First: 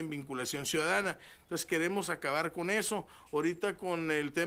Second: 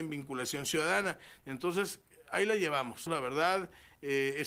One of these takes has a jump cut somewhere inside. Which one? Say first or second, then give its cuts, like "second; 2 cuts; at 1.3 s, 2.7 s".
second; 2 cuts; at 1.4 s, 3.1 s